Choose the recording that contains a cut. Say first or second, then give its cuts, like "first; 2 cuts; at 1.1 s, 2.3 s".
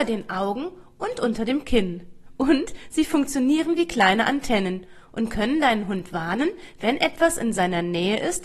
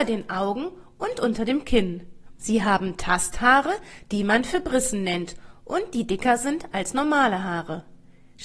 second; 1 cut; at 2.4 s